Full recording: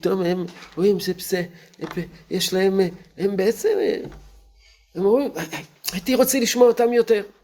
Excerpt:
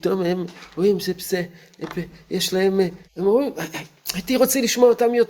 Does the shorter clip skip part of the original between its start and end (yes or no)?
yes